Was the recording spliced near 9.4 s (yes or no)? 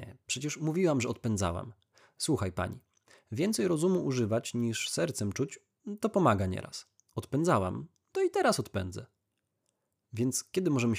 no